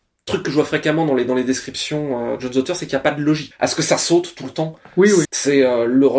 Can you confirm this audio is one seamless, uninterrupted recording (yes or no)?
no